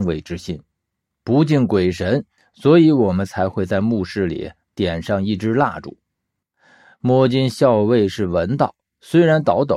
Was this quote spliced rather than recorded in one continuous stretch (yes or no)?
yes